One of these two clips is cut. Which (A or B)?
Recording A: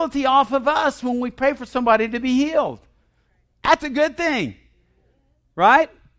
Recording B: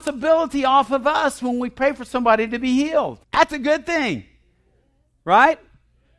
B